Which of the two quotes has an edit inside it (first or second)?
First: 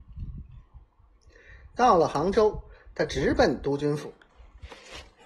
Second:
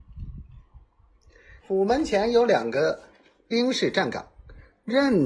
second